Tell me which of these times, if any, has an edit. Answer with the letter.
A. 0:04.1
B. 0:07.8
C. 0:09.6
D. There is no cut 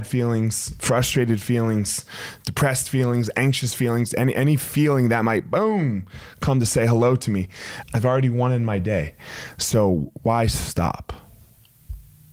B